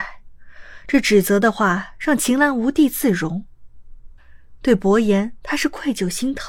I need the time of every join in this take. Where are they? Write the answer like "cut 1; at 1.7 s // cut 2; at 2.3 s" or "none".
cut 1; at 4.6 s

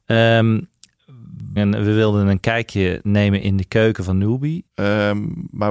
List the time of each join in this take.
cut 1; at 1.6 s // cut 2; at 4.7 s

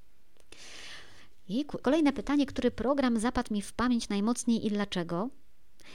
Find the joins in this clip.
cut 1; at 1.8 s

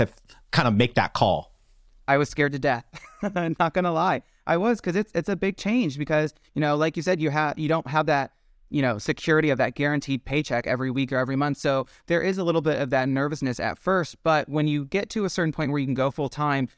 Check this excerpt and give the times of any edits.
none

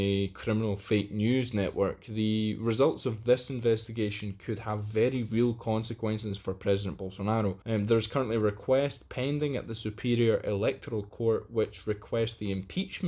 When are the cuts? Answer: cut 1; at 7.6 s

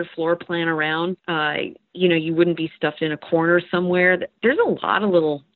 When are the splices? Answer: cut 1; at 1.2 s

